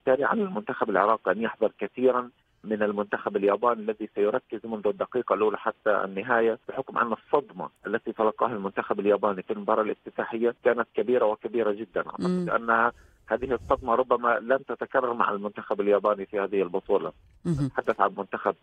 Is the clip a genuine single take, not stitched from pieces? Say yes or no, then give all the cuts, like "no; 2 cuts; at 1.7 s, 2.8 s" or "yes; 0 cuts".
no; 3 cuts; at 2.6 s, 6.6 s, 10.6 s